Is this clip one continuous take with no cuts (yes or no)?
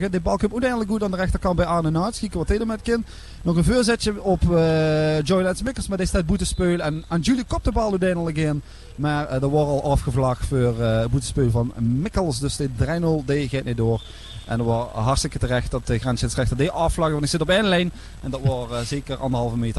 yes